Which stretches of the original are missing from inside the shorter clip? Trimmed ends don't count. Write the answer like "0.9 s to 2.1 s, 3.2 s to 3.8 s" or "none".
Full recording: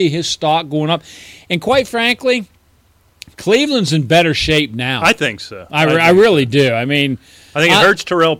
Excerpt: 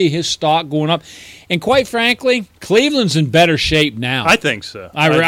2.6 s to 3.3 s